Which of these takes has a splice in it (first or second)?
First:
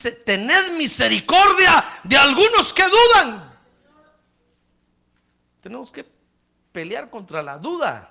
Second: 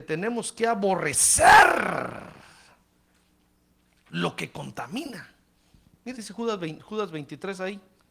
second